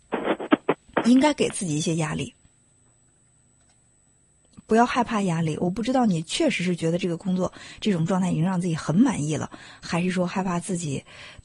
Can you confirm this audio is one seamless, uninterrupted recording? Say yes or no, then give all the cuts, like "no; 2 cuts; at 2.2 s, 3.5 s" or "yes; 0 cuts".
yes; 0 cuts